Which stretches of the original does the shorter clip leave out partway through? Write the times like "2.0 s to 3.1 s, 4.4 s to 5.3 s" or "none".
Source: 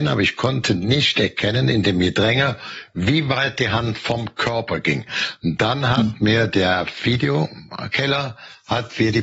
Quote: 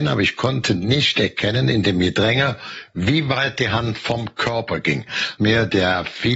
5.4 s to 6.2 s